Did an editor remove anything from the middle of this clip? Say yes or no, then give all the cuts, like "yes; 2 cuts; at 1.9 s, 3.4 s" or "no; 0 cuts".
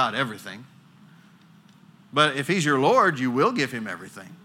no; 0 cuts